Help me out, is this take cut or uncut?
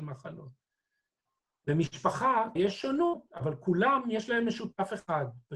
cut